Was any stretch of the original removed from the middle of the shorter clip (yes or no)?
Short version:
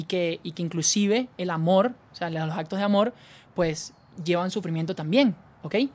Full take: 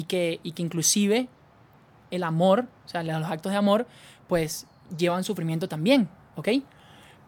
yes